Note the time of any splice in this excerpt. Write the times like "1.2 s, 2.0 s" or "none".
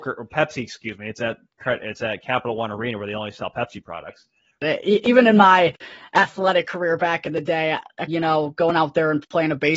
4.6 s, 8.1 s